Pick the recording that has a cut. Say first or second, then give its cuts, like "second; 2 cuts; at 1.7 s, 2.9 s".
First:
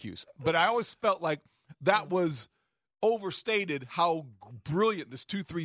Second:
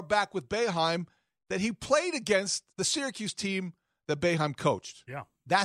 second; 1 cut; at 2.7 s